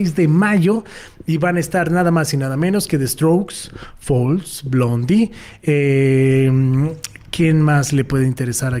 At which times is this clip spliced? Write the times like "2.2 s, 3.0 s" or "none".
none